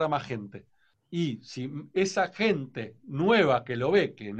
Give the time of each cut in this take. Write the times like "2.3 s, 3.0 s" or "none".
none